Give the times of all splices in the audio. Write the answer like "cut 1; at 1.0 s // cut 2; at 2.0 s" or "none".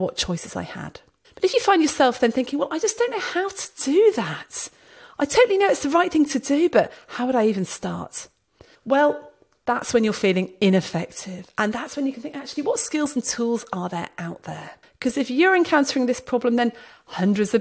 cut 1; at 14.8 s